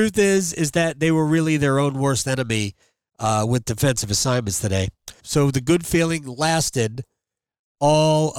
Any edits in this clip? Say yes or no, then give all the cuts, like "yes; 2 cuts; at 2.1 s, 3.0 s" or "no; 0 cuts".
yes; 1 cut; at 5.2 s